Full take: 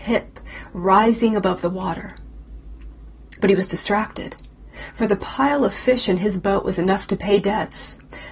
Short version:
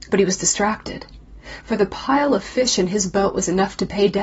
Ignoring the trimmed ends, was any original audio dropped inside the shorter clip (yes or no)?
no